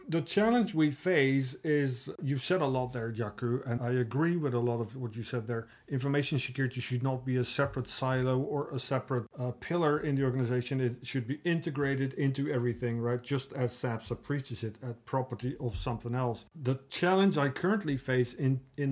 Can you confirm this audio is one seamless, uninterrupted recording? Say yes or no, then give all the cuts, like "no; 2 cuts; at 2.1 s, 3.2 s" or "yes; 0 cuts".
no; 1 cut; at 3.8 s